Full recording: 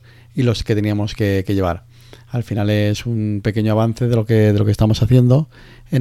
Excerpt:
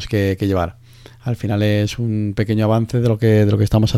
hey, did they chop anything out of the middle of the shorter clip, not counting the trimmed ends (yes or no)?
no